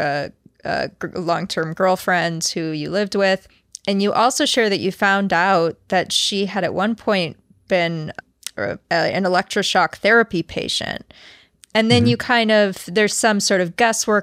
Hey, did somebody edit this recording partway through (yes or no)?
yes